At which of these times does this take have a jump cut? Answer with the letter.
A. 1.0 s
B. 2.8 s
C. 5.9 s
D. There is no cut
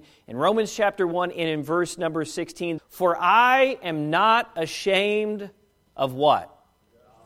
B